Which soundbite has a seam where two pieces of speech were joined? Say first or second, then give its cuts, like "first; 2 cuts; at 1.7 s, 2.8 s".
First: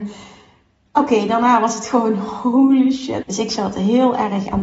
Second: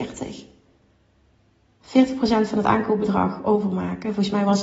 first; 1 cut; at 3.2 s